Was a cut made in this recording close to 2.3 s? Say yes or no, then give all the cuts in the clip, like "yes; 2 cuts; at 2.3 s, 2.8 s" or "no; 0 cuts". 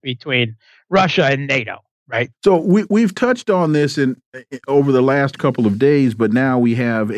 yes; 1 cut; at 2.3 s